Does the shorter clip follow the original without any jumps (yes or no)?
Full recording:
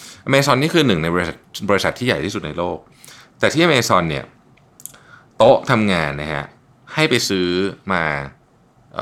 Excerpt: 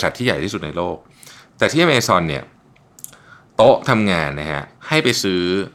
no